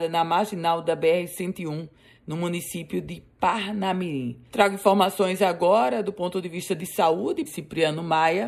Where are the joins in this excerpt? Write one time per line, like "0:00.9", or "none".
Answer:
0:04.5
0:07.5

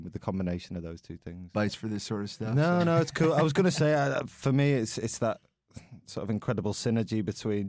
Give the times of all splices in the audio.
0:01.5

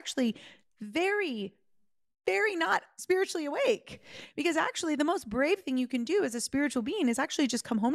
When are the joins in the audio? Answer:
none

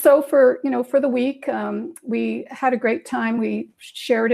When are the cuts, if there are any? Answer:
none

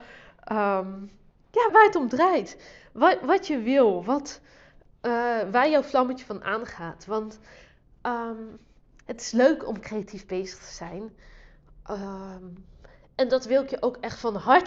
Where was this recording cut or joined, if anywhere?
0:01.7

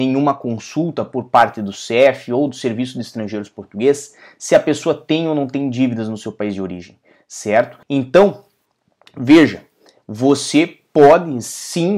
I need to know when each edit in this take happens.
0:07.8

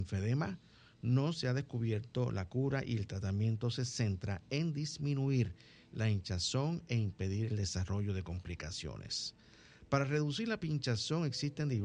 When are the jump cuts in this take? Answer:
none

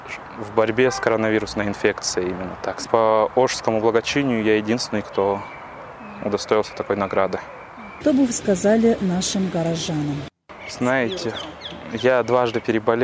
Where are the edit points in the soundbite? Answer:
0:02.9

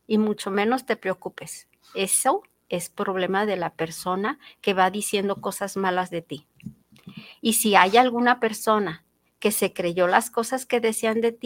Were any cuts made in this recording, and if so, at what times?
none

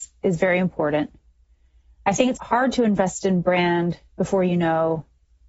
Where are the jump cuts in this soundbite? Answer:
0:02.3

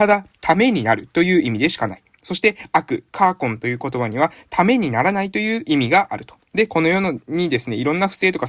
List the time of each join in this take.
none

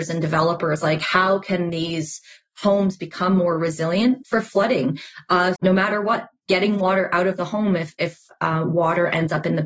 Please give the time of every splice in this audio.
0:05.6

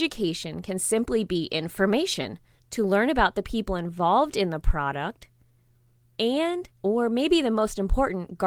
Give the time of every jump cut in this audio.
0:02.6
0:06.7

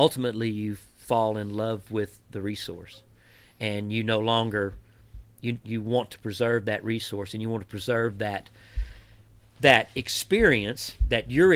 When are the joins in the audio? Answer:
0:05.6

